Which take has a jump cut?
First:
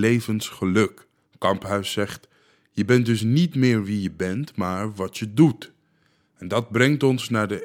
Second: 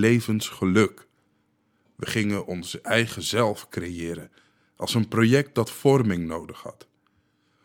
first; 1 cut; at 1.3 s

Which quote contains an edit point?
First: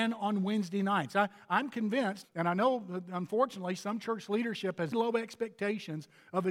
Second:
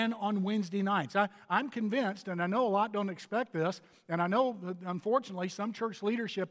first; 2 cuts; at 2.2 s, 4.9 s

